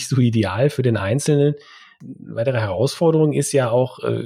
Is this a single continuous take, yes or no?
yes